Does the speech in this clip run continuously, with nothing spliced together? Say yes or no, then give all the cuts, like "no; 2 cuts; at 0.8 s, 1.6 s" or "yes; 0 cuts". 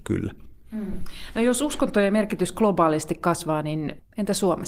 yes; 0 cuts